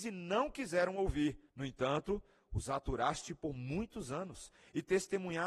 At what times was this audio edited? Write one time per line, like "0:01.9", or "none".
0:01.5